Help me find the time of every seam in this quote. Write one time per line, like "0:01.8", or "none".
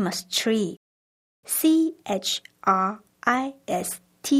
0:01.4

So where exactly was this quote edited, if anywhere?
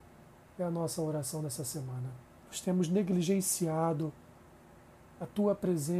0:02.4

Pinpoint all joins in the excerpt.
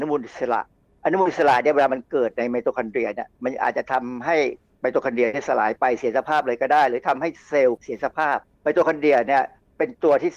none

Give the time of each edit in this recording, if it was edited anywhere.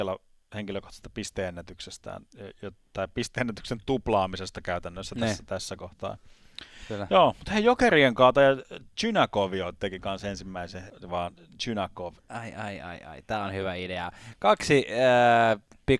0:10.9
0:12.2

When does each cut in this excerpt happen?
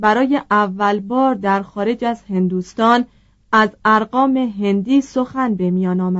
none

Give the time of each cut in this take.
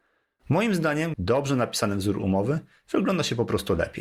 0:01.1

